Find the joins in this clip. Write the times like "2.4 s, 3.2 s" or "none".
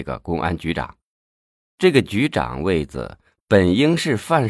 1.6 s